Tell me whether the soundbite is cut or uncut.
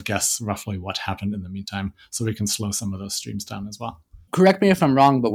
uncut